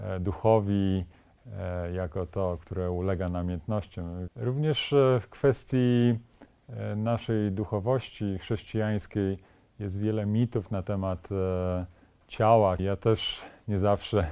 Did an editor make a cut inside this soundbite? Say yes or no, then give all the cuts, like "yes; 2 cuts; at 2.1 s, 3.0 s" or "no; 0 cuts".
yes; 2 cuts; at 4.3 s, 12.8 s